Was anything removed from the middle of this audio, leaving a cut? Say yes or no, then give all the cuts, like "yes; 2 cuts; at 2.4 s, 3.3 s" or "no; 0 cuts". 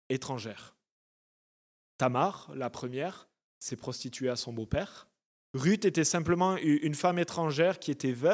yes; 2 cuts; at 1.9 s, 5.4 s